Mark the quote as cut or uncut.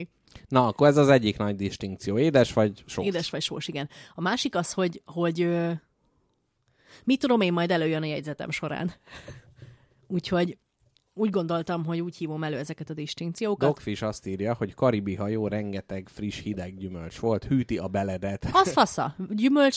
uncut